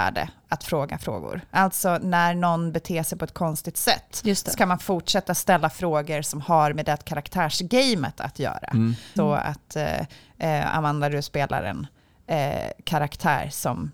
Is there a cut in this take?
yes; 1 cut; at 9.2 s

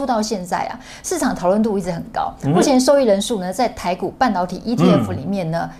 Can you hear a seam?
no; 0 cuts

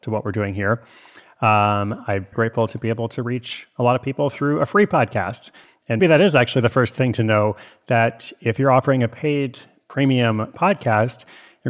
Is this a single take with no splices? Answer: no; 2 cuts; at 2.3 s, 6.0 s

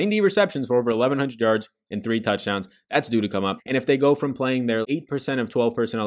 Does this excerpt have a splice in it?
yes; 2 cuts; at 3.6 s, 4.8 s

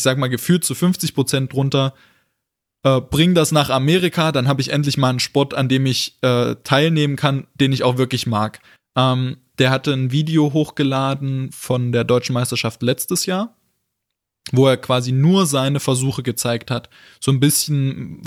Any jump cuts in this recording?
yes; 1 cut; at 8.8 s

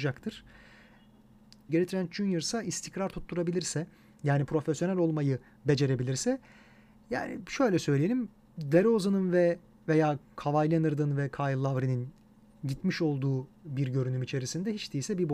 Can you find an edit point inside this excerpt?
yes; 1 cut; at 1.7 s

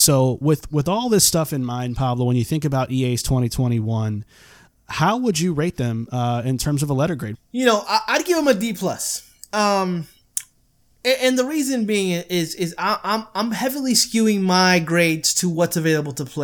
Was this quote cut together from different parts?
yes; 1 cut; at 7.3 s

